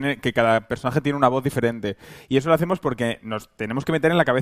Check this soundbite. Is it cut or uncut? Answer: uncut